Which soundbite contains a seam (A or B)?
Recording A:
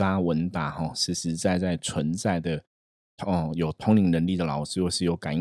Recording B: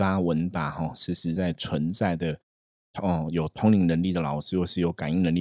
B